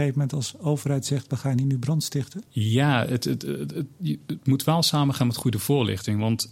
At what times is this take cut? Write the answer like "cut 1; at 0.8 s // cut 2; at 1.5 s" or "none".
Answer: cut 1; at 2.5 s